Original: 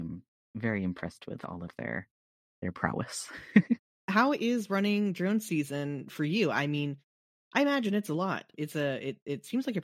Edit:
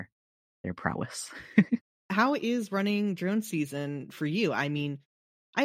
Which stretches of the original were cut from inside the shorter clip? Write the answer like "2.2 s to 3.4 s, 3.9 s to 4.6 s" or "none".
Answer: none